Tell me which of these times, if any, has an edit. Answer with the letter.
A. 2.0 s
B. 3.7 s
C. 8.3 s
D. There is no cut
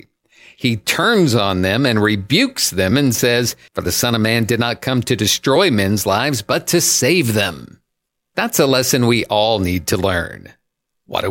B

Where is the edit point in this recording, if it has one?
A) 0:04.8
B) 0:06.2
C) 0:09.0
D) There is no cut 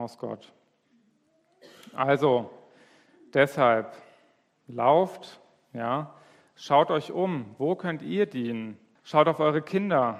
C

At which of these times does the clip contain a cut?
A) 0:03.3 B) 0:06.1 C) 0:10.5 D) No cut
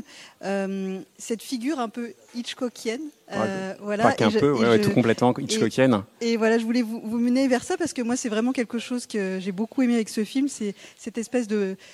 D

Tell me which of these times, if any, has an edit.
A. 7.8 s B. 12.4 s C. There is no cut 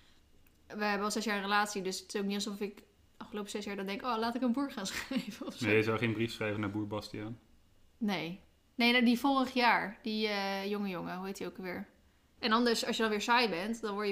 B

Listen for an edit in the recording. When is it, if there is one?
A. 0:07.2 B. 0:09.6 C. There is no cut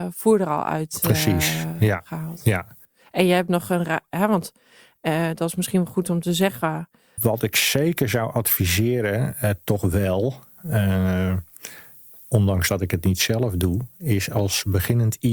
A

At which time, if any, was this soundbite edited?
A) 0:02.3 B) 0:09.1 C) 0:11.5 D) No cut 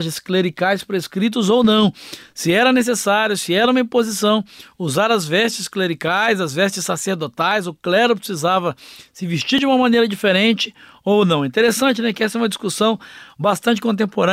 D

